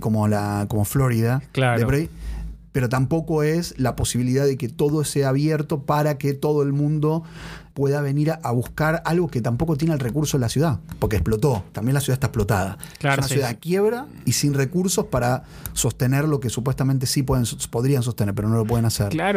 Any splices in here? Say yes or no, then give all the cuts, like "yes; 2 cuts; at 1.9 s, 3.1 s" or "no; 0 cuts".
yes; 1 cut; at 7.7 s